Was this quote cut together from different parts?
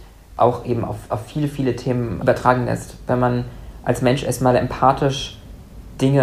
no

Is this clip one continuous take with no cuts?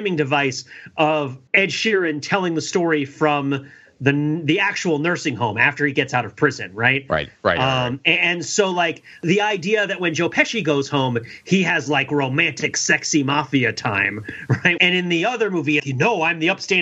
no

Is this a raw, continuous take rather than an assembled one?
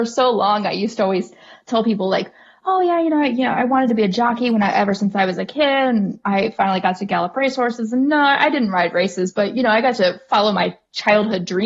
yes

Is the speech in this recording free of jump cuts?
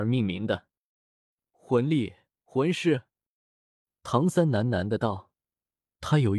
yes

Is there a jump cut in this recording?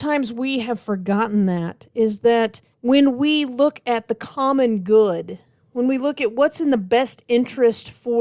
yes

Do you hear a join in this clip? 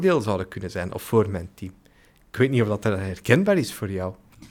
no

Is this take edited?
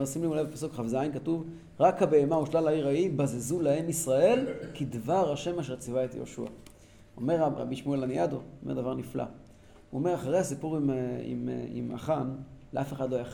yes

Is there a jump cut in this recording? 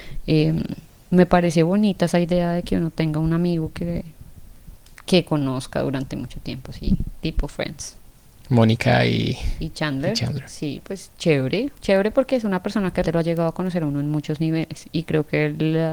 yes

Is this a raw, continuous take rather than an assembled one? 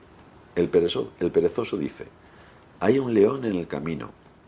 yes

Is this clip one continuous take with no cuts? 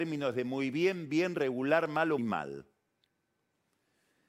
no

